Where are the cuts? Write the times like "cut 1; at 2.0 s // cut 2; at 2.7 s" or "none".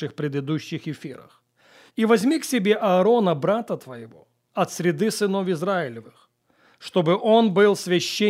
cut 1; at 1.9 s // cut 2; at 4.5 s